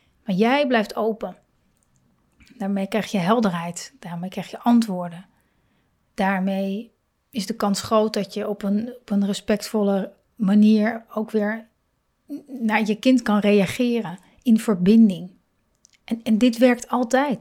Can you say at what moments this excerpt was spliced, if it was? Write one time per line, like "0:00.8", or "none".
none